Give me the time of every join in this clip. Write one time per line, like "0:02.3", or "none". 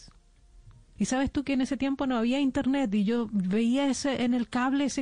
0:01.0